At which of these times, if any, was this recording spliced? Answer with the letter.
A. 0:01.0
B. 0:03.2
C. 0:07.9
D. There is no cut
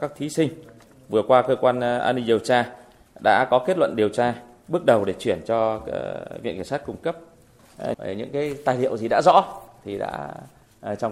C